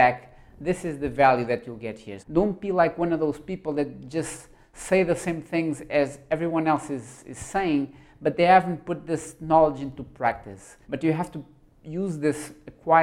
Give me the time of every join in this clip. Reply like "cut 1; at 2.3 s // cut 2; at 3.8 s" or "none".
cut 1; at 2.2 s // cut 2; at 10.8 s